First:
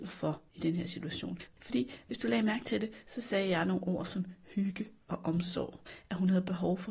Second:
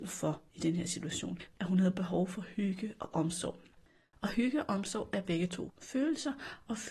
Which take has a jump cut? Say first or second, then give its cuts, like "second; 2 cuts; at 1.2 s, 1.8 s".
second; 1 cut; at 1.6 s